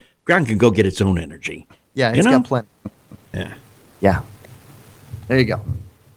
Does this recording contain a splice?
no; 0 cuts

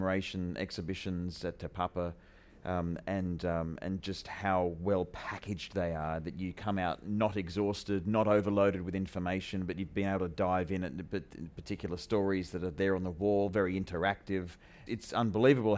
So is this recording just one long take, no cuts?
yes; 0 cuts

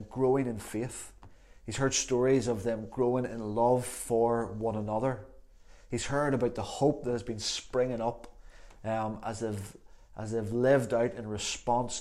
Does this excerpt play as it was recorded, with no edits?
yes; 0 cuts

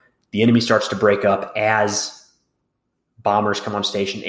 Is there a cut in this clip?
no; 0 cuts

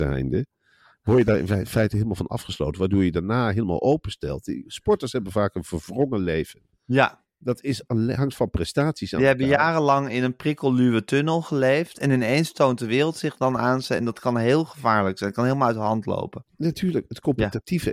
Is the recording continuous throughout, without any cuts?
yes; 0 cuts

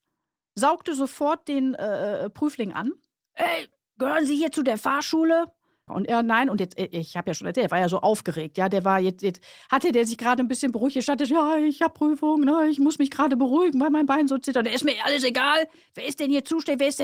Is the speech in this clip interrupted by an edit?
yes; 1 cut; at 5.9 s

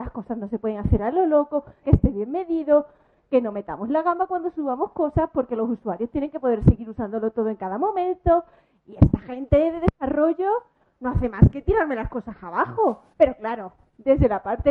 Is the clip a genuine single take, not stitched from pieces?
no; 2 cuts; at 1.8 s, 13.1 s

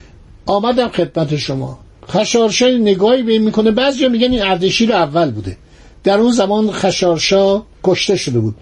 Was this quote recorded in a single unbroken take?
yes; 0 cuts

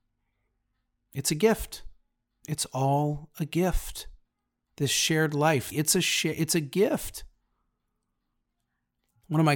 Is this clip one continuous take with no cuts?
no; 1 cut; at 5.7 s

